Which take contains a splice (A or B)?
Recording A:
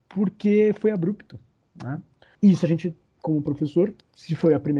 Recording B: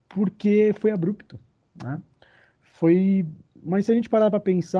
A